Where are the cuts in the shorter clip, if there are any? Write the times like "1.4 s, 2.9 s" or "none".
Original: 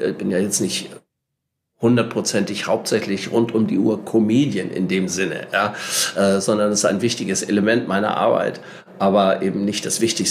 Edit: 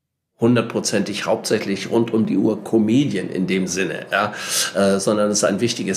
none